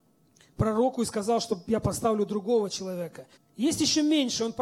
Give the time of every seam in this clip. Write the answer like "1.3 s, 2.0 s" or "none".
3.3 s